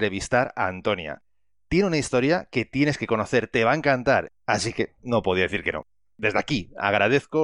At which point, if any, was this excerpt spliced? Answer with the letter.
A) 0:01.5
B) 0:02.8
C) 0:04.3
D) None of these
C